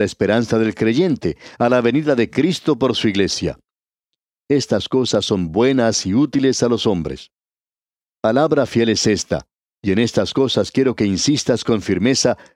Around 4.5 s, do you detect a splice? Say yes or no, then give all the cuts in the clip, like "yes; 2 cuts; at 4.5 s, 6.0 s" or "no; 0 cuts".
yes; 2 cuts; at 4.5 s, 8.0 s